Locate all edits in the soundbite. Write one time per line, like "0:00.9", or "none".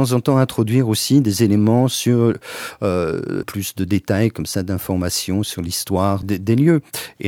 0:03.4
0:06.2

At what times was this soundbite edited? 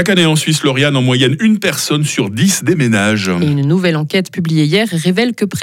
none

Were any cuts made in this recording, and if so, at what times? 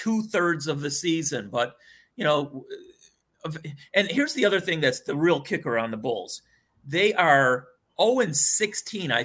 none

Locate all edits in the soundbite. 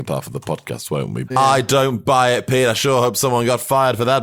0:01.3

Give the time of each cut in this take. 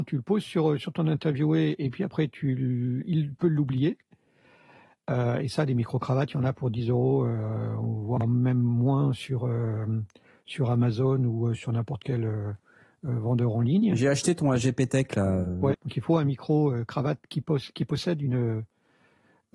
0:15.7

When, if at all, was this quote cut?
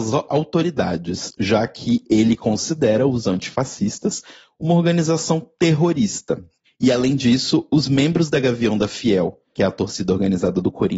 0:06.7

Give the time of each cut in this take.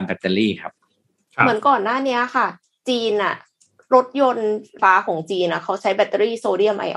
0:04.8

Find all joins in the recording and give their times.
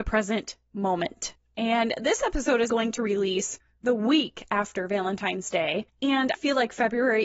0:02.7
0:06.3

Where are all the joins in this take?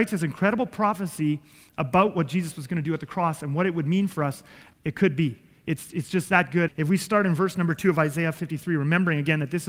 0:04.7
0:06.7

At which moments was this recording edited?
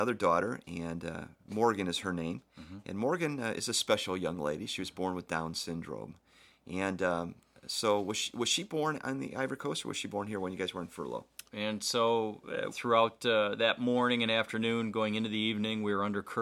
0:11.5
0:12.7

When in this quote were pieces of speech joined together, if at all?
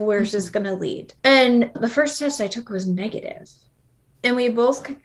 0:01.2

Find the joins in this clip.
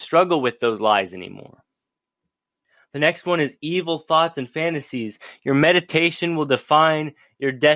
none

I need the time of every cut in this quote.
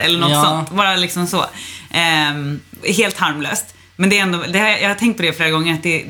none

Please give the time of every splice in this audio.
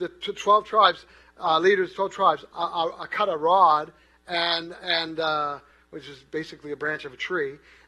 0:02.5

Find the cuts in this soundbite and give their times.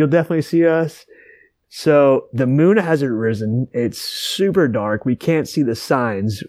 0:01.6

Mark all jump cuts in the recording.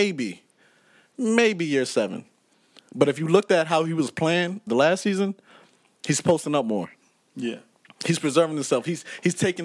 0:04.7

